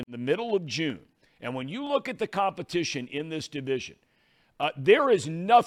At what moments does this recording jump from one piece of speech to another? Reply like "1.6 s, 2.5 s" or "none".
none